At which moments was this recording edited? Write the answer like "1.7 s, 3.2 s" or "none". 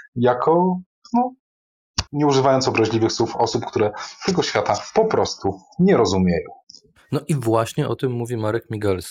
2.1 s